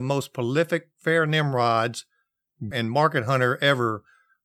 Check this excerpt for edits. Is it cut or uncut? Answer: cut